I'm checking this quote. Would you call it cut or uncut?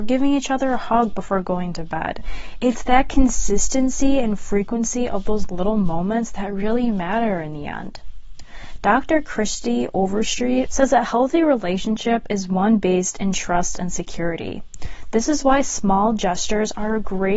cut